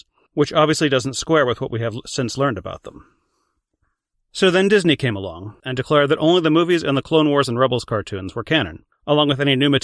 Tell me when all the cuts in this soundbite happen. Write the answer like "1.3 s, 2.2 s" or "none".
5.6 s